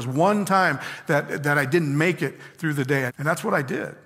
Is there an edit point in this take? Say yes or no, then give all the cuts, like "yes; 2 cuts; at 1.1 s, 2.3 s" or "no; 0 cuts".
yes; 1 cut; at 3.1 s